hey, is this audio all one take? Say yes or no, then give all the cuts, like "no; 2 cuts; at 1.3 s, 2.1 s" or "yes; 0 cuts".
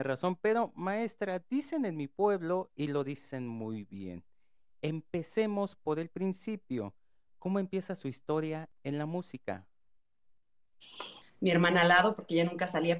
no; 1 cut; at 11.2 s